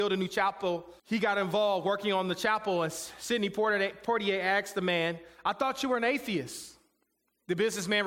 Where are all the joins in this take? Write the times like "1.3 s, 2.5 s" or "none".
1.0 s